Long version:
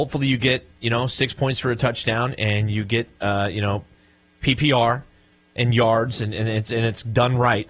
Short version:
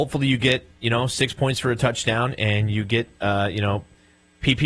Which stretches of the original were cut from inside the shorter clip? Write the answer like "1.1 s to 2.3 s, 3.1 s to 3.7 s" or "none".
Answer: none